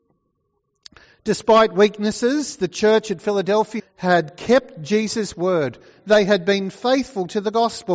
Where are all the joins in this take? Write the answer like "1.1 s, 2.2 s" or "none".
3.8 s, 6.0 s